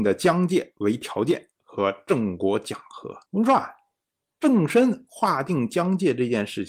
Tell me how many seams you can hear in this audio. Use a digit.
1